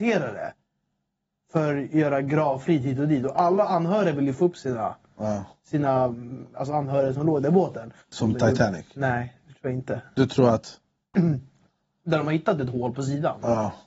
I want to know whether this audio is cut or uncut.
cut